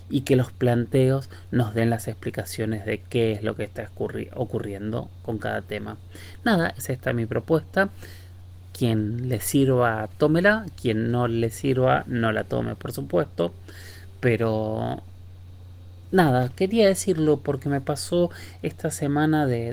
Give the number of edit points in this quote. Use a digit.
1